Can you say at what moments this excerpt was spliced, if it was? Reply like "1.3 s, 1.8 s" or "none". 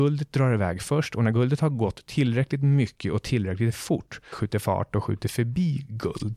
4.3 s